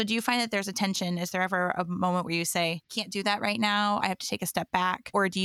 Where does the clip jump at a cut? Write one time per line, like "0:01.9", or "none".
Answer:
none